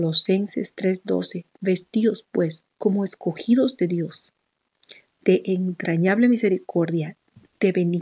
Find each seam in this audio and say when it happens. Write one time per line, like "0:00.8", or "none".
0:02.7
0:05.1